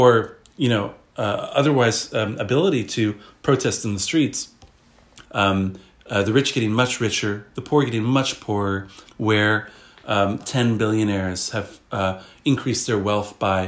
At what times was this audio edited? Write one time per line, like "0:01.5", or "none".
0:05.2
0:09.1
0:10.4